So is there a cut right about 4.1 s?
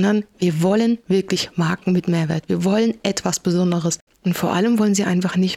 yes; 1 cut; at 4.1 s

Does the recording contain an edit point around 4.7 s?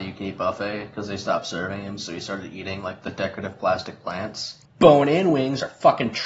yes; 1 cut; at 4.7 s

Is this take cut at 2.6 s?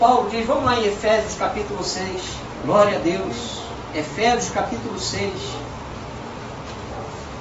yes; 1 cut; at 2.6 s

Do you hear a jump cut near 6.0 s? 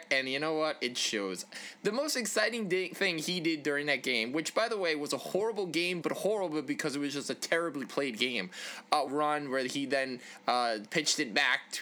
yes; 2 cuts; at 6.0 s, 9.1 s

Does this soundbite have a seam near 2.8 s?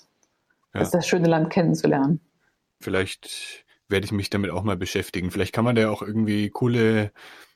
yes; 1 cut; at 2.8 s

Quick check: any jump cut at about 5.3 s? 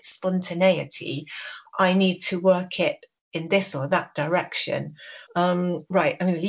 yes; 1 cut; at 5.3 s

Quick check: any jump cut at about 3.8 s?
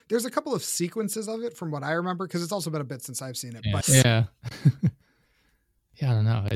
yes; 1 cut; at 3.8 s

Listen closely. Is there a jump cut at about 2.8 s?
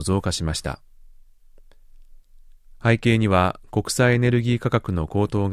no; 0 cuts

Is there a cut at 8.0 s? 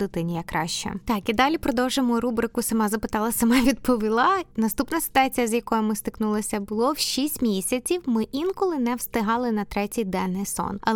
no; 0 cuts

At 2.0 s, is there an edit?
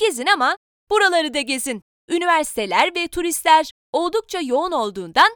yes; 1 cut; at 2.0 s

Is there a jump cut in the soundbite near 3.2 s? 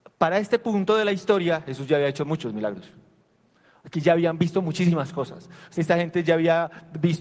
no; 1 cut; at 5.7 s

